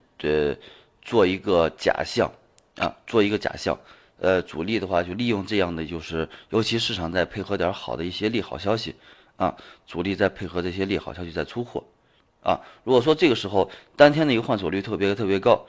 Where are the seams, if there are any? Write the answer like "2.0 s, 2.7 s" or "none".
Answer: none